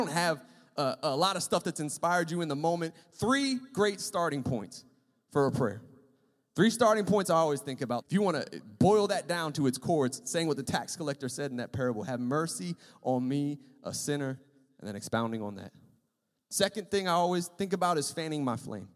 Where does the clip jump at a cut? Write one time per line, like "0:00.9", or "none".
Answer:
0:08.0